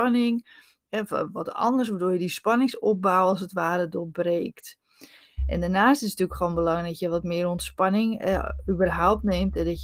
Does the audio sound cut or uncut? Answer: uncut